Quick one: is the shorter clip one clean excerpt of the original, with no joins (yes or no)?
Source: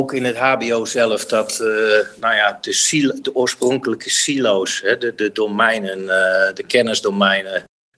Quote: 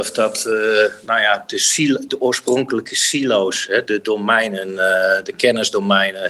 no